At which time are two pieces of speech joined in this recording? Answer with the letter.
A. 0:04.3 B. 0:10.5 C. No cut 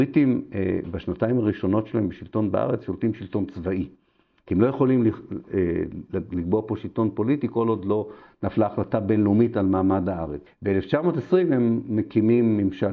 B